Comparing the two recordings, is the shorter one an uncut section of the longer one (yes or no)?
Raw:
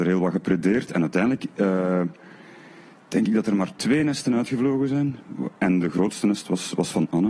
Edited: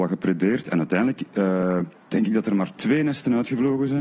no